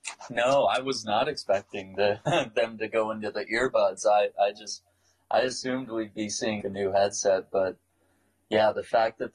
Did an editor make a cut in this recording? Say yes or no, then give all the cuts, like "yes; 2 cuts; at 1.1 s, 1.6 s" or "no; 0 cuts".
yes; 1 cut; at 6.6 s